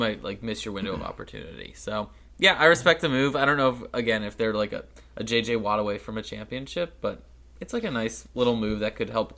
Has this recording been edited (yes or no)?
no